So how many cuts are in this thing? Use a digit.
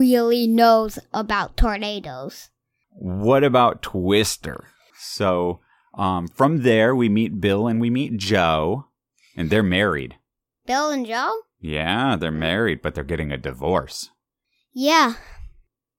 2